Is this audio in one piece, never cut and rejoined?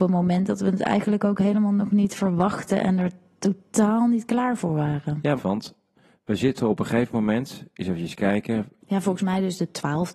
no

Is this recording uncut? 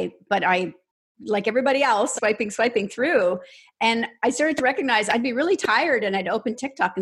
no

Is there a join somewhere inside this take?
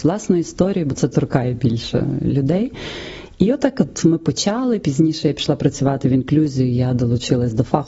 no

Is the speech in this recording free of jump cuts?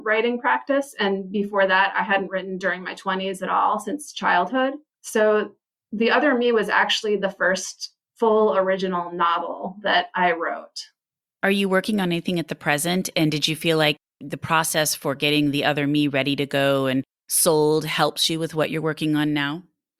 no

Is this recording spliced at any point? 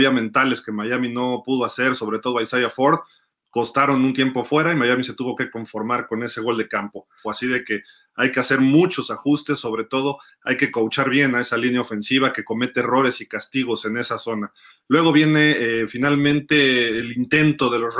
yes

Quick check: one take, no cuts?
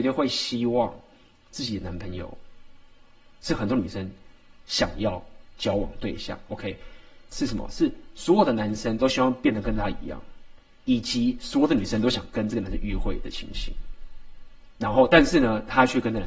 no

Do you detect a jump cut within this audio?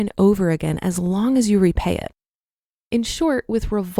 no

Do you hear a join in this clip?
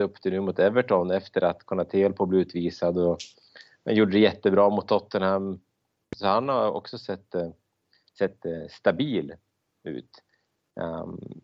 no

